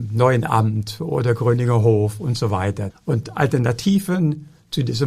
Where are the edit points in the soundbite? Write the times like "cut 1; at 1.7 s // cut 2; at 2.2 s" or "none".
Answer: cut 1; at 2.9 s